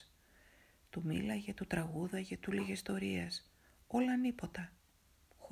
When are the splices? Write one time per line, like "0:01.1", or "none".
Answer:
none